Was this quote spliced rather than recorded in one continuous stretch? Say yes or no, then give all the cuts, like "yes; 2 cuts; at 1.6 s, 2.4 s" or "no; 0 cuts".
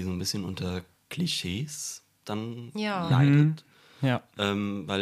no; 0 cuts